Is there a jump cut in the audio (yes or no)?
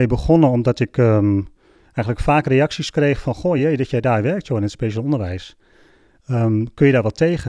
no